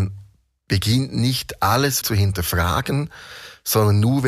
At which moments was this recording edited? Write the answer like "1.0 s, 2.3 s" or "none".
2.0 s